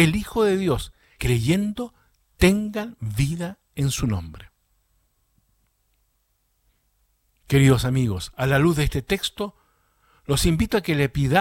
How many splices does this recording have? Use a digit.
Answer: 1